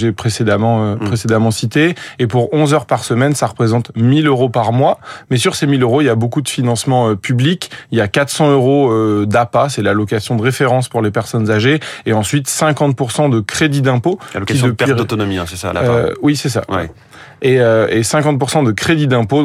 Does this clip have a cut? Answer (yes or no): no